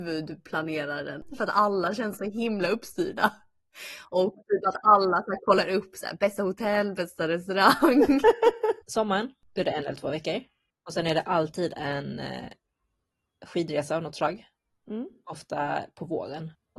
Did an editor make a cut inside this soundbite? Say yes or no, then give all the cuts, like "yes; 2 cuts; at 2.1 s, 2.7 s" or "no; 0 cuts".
yes; 1 cut; at 8.8 s